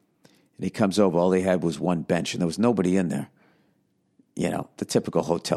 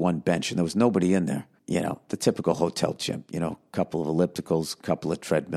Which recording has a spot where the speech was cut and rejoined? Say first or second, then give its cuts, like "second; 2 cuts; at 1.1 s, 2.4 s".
second; 1 cut; at 1.6 s